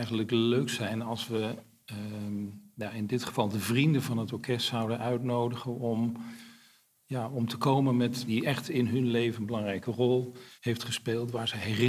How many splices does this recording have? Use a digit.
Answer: 2